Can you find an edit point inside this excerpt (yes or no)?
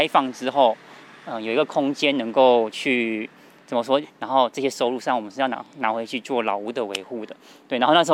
yes